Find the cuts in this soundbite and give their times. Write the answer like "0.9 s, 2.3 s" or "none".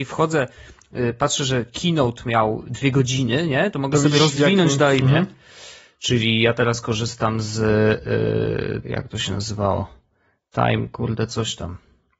5.0 s, 8.8 s